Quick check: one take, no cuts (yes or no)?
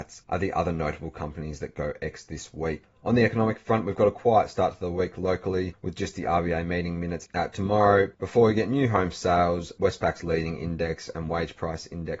yes